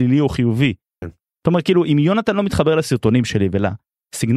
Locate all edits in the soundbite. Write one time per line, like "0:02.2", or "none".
0:01.0

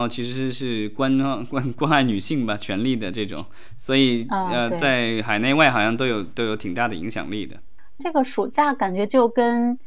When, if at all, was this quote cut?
0:08.0

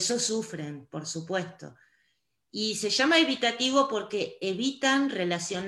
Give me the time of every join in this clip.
none

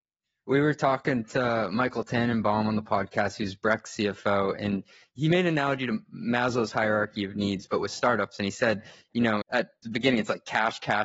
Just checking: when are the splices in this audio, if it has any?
0:09.4

